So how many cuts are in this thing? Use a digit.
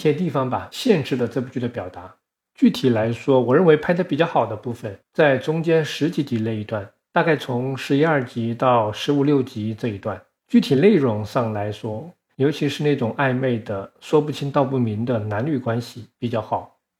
1